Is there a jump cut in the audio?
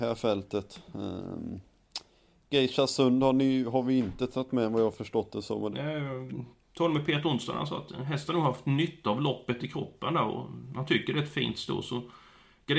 yes; 1 cut; at 5.7 s

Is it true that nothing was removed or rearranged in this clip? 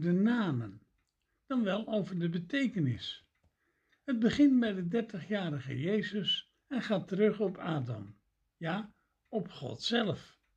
yes; 0 cuts

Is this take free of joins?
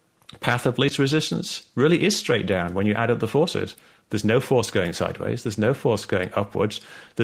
yes; 0 cuts

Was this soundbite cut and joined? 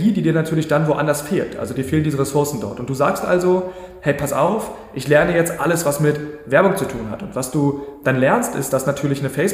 no; 0 cuts

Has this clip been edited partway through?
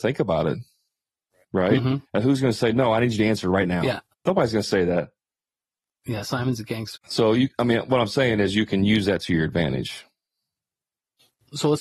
yes; 2 cuts; at 4.1 s, 7.0 s

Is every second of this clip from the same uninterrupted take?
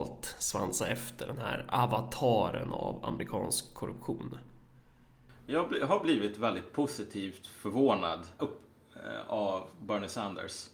no; 1 cut; at 8.4 s

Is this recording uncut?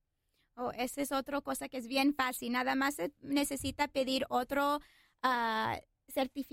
yes; 0 cuts

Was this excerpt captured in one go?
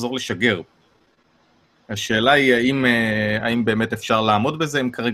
yes; 0 cuts

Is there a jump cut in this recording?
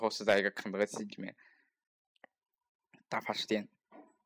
no; 0 cuts

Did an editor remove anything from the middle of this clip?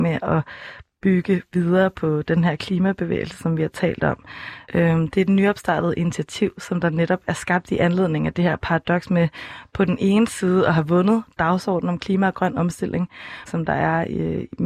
yes; 2 cuts; at 4.6 s, 13.5 s

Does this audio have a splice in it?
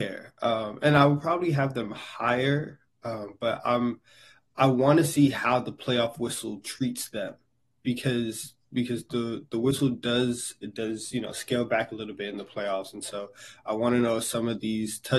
no; 0 cuts

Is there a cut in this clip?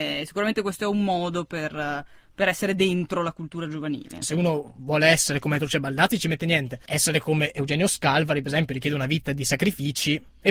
yes; 1 cut; at 4.2 s

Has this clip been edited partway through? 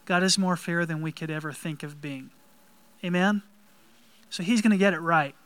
no; 0 cuts

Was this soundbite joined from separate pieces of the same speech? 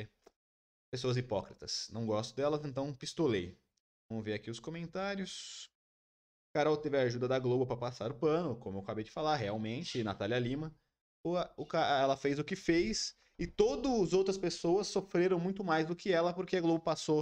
no; 0 cuts

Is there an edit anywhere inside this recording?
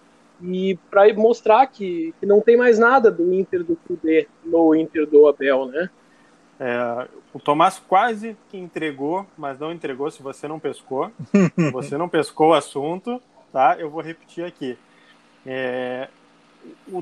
no; 0 cuts

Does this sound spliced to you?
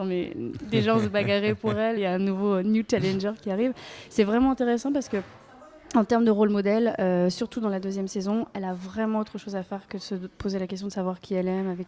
yes; 1 cut; at 2.0 s

